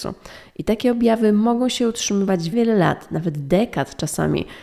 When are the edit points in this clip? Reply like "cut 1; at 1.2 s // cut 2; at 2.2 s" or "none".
cut 1; at 2.5 s